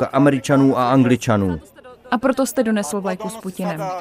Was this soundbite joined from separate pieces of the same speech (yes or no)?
no